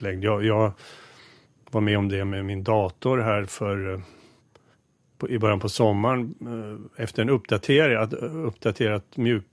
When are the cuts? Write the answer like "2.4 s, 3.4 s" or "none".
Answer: none